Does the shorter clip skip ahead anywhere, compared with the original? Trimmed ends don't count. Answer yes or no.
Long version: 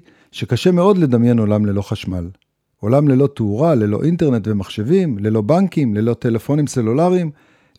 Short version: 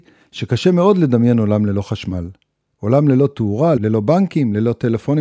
yes